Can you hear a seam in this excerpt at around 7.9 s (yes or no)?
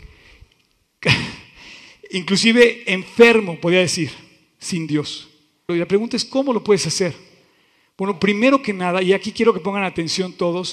no